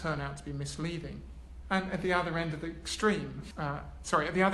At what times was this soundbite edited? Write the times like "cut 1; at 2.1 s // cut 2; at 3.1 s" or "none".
cut 1; at 1.6 s // cut 2; at 3.5 s